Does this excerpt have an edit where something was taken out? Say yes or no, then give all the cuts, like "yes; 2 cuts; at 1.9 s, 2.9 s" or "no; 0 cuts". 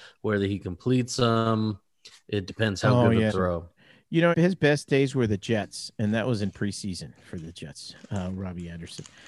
yes; 2 cuts; at 3.3 s, 4.3 s